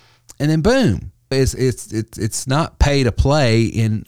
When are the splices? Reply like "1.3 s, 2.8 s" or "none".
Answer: 1.3 s